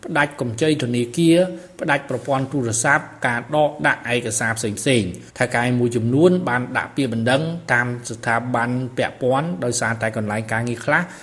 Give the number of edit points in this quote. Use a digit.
1